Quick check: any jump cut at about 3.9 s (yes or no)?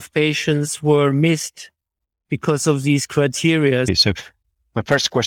yes